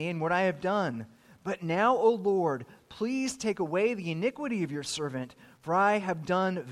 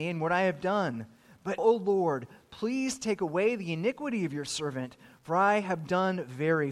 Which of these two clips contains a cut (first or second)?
second